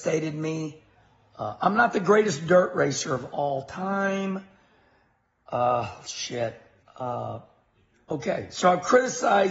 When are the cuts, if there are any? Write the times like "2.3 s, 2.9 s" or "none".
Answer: 6.8 s